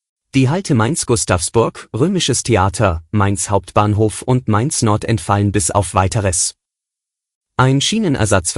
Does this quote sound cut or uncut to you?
uncut